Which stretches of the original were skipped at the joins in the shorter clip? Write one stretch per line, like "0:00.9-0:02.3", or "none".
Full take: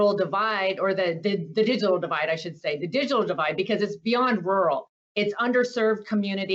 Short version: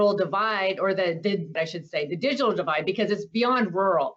0:01.6-0:02.3